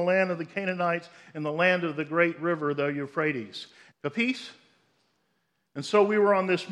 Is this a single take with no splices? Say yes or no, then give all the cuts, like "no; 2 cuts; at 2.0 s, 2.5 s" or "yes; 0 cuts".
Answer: no; 1 cut; at 3.9 s